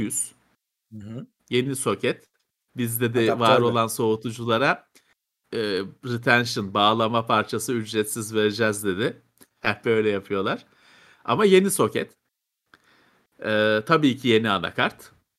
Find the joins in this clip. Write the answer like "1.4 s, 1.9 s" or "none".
2.5 s